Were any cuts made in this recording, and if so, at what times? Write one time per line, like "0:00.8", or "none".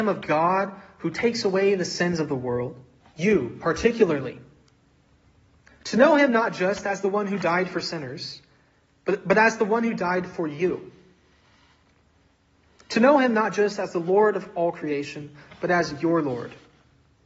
0:03.0